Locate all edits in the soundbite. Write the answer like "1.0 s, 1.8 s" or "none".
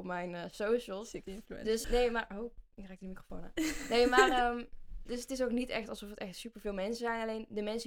1.8 s, 5.1 s